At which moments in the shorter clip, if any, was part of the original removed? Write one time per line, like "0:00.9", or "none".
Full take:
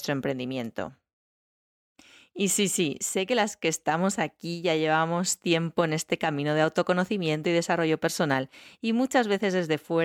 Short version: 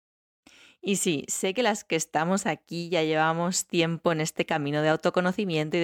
0:01.0